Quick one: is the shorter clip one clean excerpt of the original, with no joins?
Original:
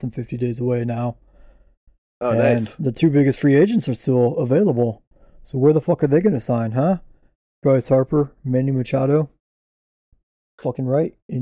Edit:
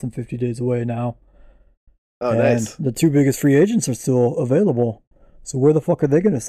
yes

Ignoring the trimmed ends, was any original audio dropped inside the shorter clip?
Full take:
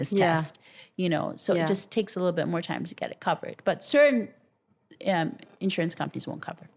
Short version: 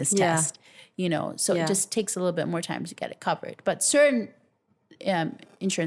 no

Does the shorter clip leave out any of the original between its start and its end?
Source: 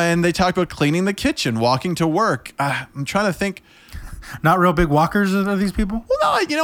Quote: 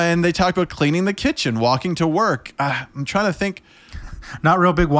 no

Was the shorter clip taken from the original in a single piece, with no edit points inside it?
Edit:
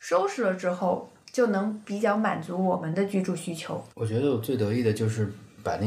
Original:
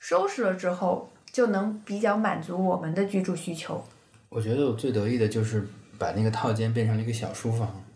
no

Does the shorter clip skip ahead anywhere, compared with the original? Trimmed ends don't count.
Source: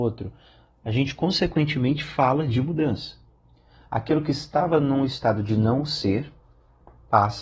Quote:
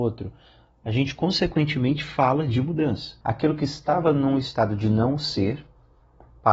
yes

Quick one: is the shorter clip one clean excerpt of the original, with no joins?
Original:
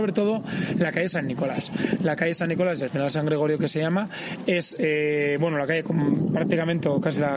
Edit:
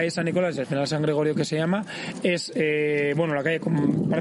yes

